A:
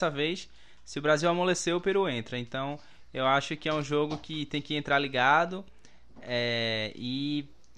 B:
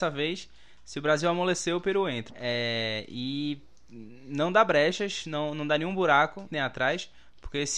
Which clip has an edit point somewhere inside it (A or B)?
B